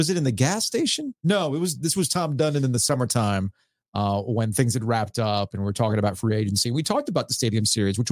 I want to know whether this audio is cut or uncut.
uncut